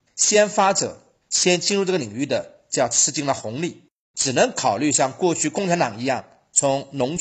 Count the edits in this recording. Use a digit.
1